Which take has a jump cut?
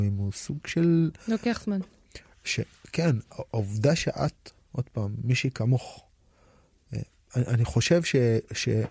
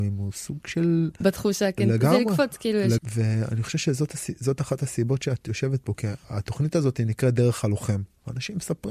second; 2 cuts; at 1.2 s, 3.0 s

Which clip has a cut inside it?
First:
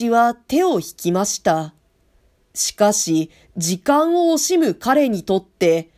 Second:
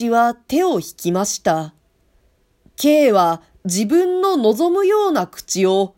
first; 1 cut; at 2.5 s

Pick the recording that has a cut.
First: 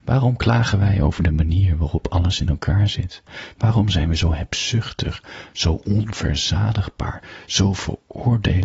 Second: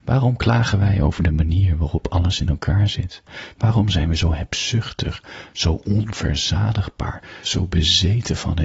second; 1 cut; at 7.4 s

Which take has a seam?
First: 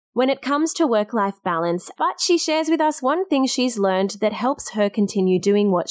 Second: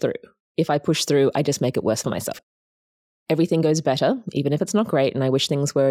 first; 1 cut; at 1.9 s

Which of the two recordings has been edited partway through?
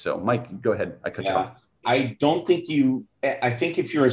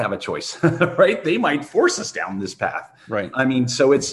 first; 1 cut; at 1.8 s

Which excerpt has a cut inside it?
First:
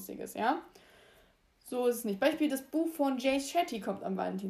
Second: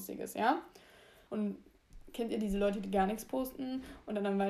second; 1 cut; at 1.3 s

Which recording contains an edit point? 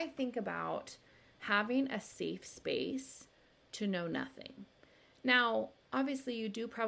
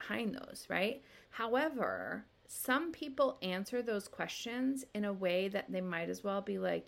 second; 2 cuts; at 1.2 s, 2.4 s

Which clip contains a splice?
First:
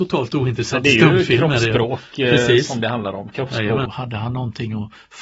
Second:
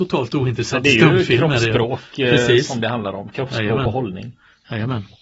first; 1 cut; at 3.9 s

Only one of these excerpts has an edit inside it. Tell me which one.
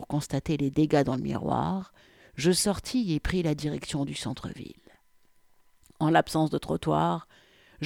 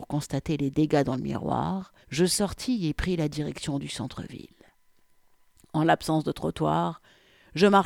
second; 1 cut; at 2.0 s

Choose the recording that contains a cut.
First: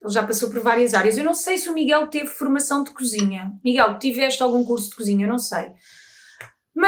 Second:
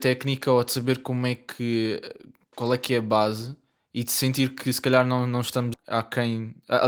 second; 1 cut; at 5.7 s

